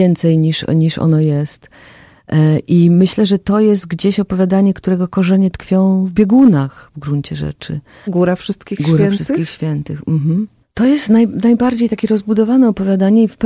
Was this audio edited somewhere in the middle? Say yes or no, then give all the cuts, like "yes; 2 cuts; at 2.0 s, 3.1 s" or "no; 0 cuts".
yes; 1 cut; at 8.1 s